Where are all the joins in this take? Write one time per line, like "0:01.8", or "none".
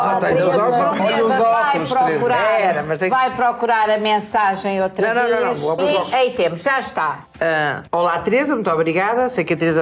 0:01.0
0:05.8